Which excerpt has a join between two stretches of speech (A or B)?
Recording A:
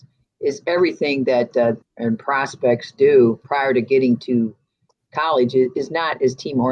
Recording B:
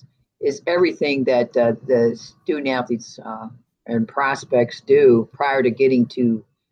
A